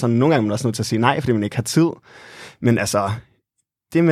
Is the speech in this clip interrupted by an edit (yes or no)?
no